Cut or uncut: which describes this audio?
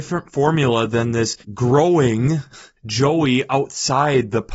cut